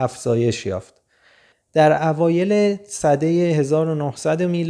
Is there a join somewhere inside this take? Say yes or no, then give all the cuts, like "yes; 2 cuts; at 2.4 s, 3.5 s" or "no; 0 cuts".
yes; 1 cut; at 1.5 s